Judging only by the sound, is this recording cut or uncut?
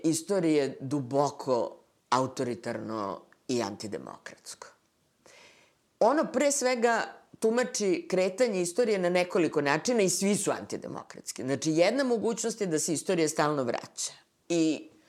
uncut